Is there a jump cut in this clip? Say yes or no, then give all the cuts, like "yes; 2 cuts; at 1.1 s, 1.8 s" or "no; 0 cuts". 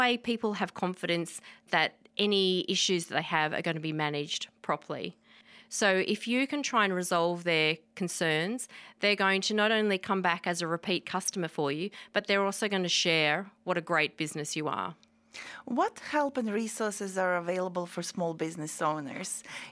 no; 0 cuts